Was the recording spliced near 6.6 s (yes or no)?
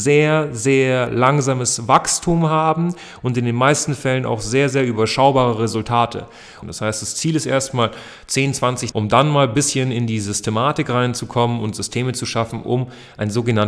yes